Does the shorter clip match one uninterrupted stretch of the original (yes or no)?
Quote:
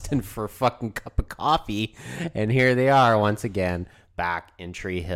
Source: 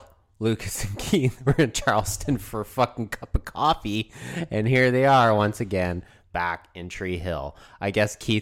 yes